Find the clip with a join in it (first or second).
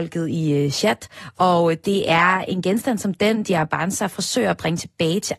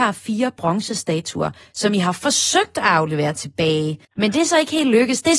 second